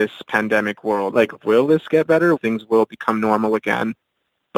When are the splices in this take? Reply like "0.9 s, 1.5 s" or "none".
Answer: 1.1 s, 2.4 s